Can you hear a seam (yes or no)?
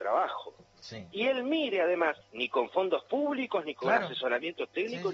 yes